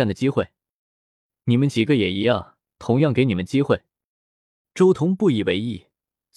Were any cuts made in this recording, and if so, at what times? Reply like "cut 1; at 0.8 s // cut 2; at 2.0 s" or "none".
cut 1; at 2.7 s